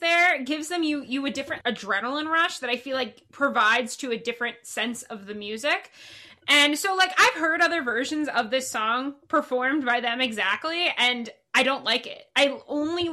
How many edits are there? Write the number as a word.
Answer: one